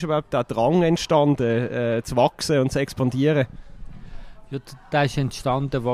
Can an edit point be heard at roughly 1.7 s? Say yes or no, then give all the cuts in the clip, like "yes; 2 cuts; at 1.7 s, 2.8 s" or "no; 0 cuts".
no; 0 cuts